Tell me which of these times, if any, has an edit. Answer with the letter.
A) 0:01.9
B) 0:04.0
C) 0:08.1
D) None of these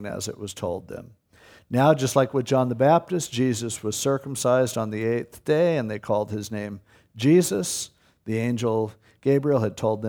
D